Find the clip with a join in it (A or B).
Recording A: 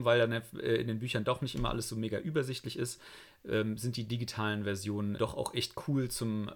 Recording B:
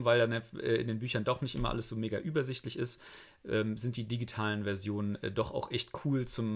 A